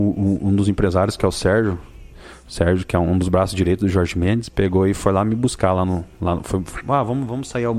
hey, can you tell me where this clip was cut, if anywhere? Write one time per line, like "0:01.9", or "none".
none